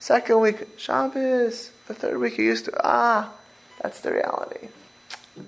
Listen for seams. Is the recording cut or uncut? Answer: uncut